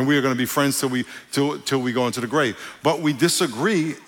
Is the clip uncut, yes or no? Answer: yes